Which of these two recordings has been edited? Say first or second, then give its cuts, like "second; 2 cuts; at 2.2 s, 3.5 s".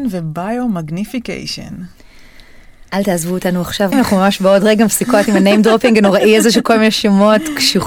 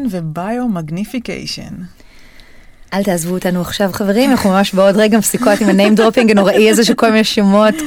first; 1 cut; at 3.9 s